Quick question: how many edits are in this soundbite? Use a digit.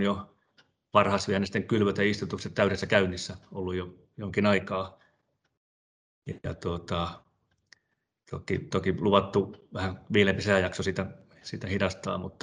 0